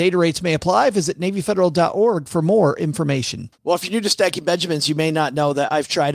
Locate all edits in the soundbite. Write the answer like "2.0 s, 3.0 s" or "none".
3.5 s

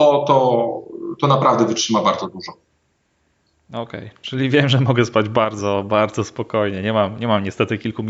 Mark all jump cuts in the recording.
none

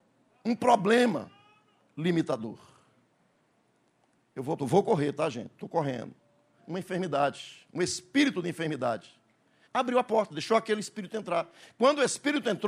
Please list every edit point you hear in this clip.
4.6 s, 6.6 s, 9.6 s

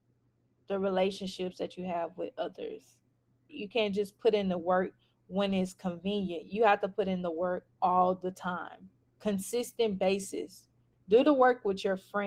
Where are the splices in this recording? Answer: 3.5 s, 7.7 s, 10.9 s

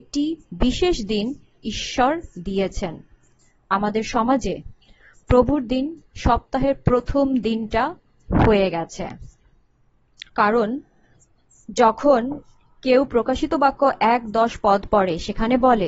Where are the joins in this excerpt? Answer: 10.3 s

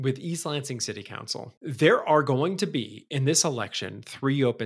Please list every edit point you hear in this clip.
1.6 s

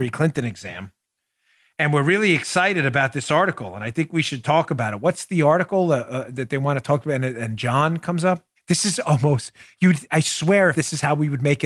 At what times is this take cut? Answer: 8.6 s, 10.7 s

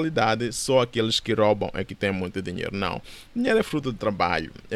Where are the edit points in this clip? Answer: none

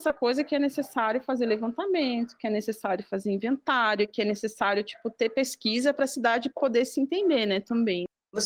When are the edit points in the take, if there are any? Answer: none

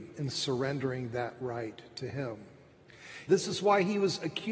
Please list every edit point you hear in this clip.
3.3 s

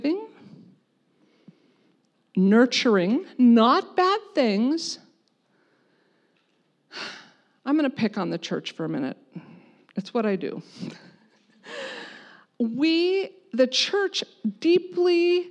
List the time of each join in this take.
none

